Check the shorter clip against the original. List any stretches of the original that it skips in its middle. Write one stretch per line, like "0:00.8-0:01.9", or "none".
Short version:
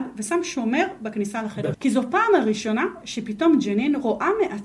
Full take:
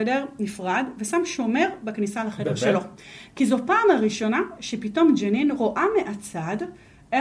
0:02.6-0:03.3